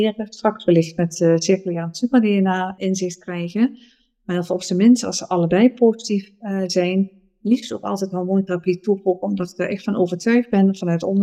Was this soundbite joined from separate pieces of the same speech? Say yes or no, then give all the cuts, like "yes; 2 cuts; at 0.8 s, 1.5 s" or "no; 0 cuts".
yes; 1 cut; at 2.8 s